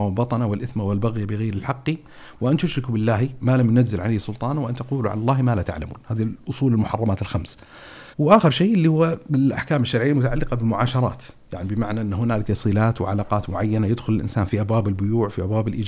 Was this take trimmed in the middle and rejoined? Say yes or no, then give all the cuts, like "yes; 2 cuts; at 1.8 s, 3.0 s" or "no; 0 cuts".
yes; 1 cut; at 8.1 s